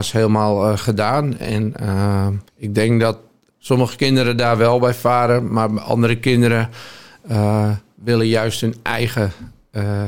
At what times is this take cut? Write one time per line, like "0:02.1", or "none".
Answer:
0:02.5

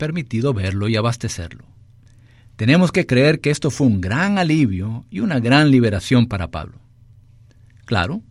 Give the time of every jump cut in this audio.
none

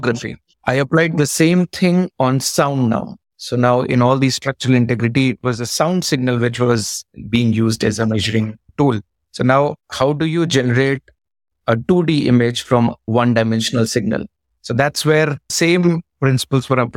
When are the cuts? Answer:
none

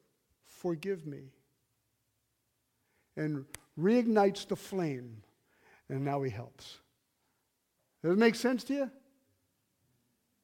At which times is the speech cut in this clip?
none

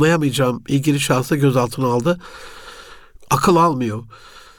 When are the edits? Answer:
0:03.2

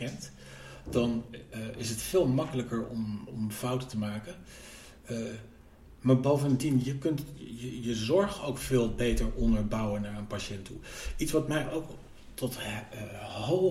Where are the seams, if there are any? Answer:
none

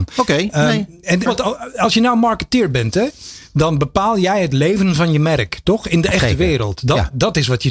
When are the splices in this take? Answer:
0:01.3

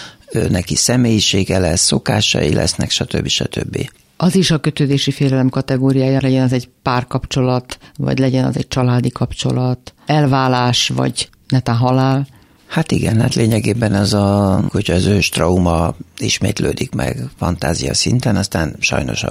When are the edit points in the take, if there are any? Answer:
0:06.2
0:14.7

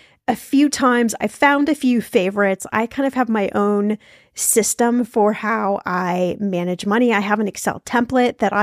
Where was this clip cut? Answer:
none

